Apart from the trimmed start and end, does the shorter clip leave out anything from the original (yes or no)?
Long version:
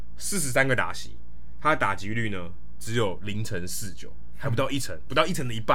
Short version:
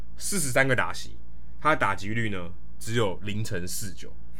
no